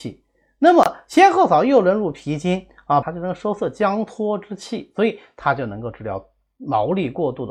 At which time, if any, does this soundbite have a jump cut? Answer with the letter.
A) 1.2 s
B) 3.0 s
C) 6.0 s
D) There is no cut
B